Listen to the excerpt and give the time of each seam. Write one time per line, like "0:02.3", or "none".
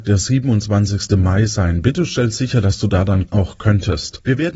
none